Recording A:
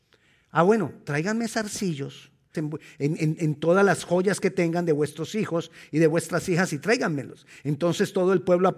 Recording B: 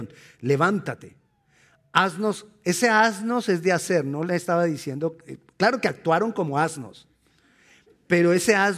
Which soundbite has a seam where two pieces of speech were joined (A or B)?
A